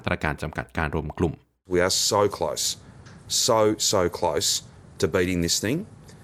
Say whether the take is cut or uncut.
uncut